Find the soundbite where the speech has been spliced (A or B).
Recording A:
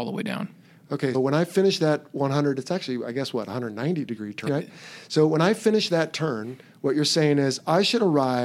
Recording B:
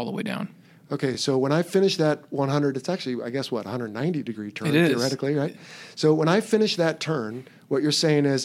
A